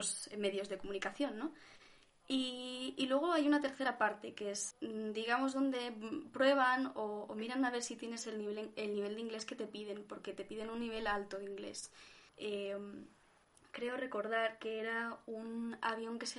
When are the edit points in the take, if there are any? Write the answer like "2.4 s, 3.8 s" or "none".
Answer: 4.7 s, 12.3 s